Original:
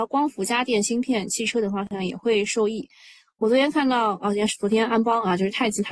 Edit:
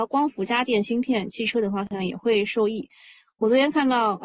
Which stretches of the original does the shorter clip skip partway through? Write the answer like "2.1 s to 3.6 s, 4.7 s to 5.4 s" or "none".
none